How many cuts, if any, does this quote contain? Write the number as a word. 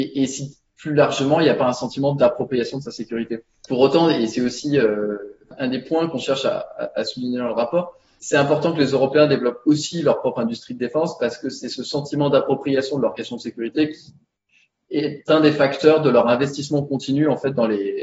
one